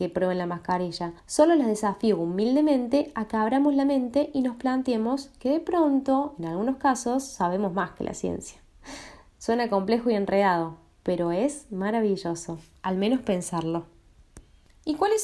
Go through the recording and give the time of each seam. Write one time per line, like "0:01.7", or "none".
0:01.2